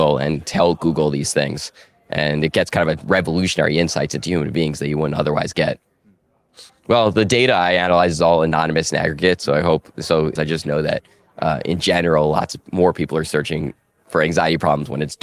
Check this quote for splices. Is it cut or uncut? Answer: cut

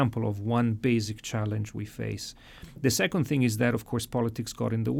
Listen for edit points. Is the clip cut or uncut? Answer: uncut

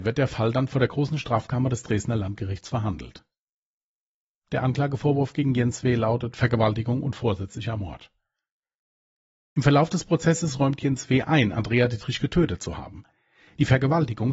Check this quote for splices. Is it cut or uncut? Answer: uncut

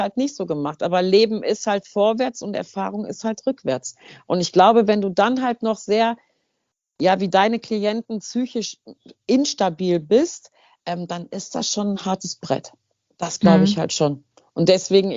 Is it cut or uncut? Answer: uncut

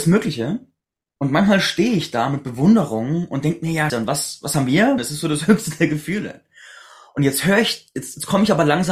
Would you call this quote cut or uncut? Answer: cut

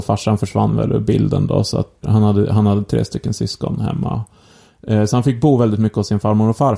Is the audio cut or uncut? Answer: cut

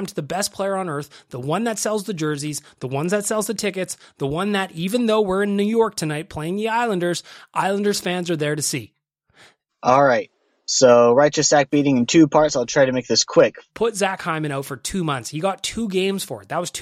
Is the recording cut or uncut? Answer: cut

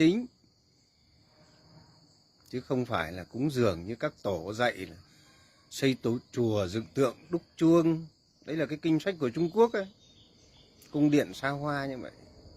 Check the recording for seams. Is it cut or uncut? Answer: uncut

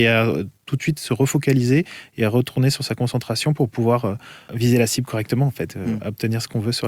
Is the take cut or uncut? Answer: uncut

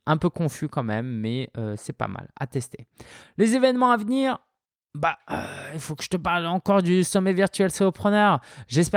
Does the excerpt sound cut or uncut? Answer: uncut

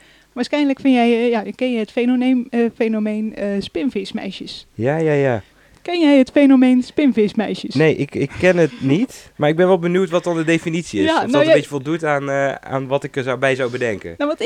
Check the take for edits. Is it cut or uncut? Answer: uncut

